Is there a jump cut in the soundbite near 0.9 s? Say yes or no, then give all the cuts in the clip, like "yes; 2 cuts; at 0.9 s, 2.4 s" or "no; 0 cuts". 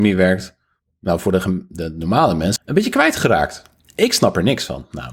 no; 1 cut; at 2.6 s